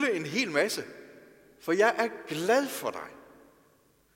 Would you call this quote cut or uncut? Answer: uncut